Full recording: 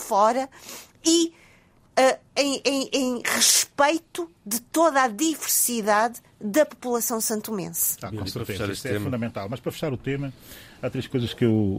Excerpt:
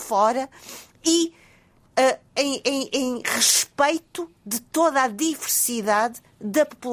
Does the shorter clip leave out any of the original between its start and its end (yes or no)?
no